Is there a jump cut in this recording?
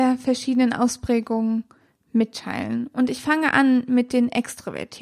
no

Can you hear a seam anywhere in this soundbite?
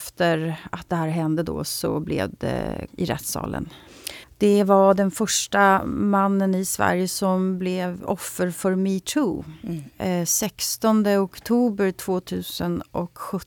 yes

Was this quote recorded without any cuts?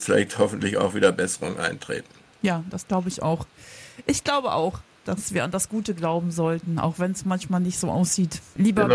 yes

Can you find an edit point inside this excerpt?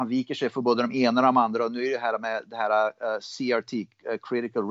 no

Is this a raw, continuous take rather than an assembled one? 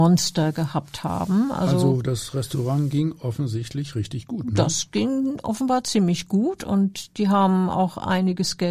yes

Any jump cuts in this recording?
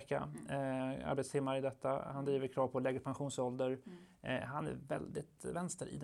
no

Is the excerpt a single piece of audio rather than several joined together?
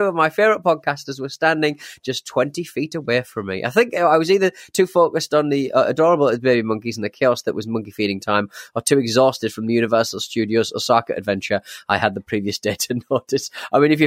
yes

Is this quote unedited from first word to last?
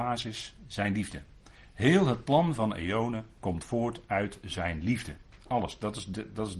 yes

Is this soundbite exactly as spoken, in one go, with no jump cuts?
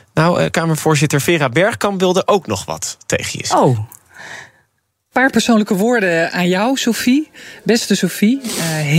yes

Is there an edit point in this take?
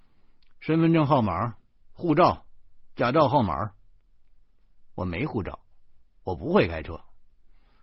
no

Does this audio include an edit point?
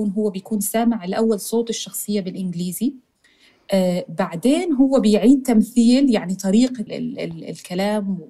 yes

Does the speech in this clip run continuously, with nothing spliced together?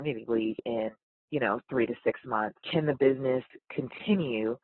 no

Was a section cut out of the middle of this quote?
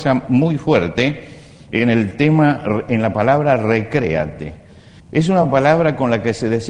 yes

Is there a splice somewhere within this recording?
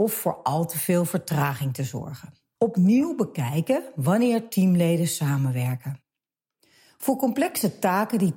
yes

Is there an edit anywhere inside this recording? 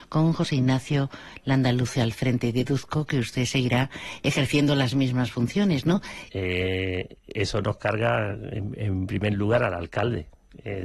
yes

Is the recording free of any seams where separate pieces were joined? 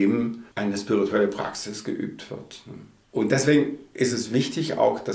yes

